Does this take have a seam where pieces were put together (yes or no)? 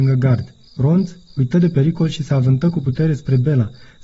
yes